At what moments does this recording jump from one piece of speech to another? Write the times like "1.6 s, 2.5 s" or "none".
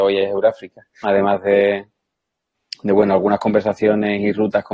1.0 s